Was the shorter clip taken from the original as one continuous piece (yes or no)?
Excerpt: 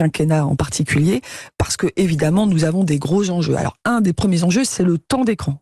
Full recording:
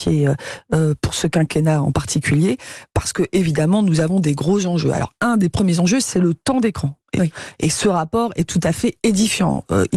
yes